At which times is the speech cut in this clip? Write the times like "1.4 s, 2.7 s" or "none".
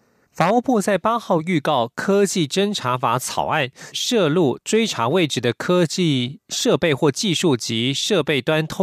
3.9 s